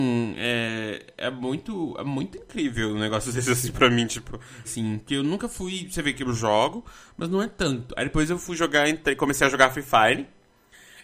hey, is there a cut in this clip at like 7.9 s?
no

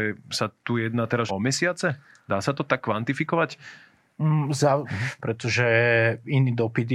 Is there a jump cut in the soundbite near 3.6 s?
no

